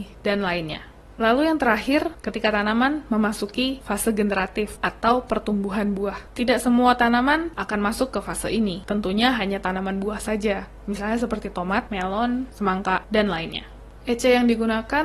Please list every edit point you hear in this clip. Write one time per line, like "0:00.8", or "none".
0:11.9